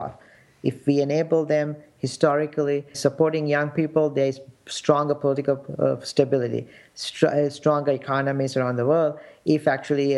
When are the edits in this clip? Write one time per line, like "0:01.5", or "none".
0:02.9